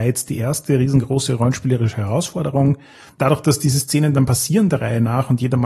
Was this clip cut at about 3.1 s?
yes; 1 cut; at 3.1 s

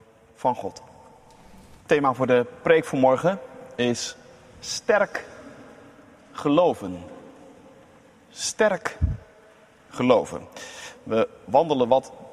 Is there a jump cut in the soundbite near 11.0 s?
no; 1 cut; at 1.8 s

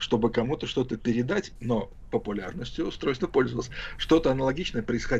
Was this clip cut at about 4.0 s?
no; 1 cut; at 1.6 s

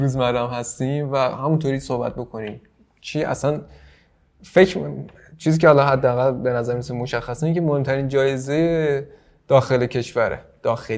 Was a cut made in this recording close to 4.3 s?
no; 0 cuts

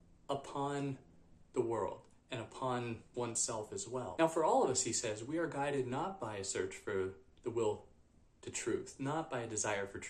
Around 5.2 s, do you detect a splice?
no; 1 cut; at 3.1 s

